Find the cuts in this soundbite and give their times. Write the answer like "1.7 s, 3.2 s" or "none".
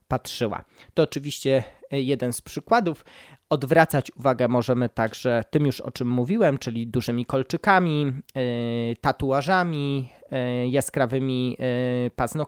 none

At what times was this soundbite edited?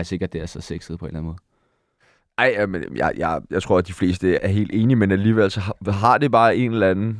4.4 s

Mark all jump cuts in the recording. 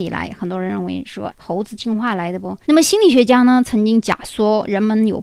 1.3 s, 2.6 s

